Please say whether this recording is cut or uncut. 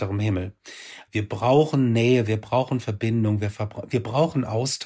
cut